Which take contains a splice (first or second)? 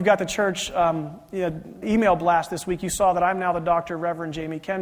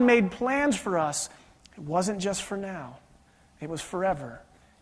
first